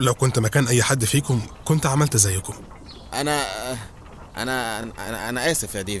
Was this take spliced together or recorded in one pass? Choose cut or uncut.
uncut